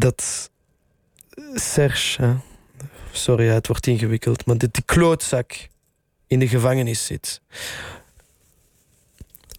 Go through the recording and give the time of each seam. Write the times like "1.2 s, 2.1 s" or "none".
none